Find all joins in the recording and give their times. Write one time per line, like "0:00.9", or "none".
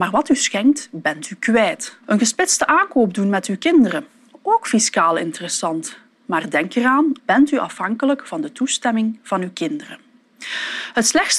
0:02.0
0:07.2